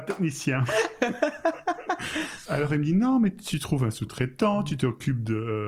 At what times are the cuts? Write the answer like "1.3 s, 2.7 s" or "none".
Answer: none